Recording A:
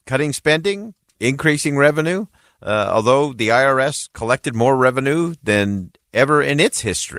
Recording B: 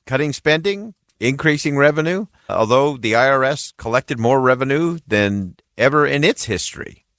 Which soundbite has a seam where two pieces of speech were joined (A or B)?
B